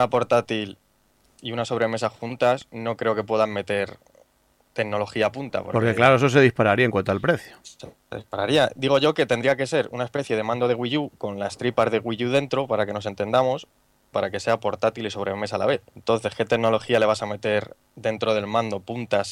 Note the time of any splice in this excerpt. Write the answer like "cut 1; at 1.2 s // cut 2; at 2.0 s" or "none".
cut 1; at 14.1 s // cut 2; at 15.9 s // cut 3; at 17.8 s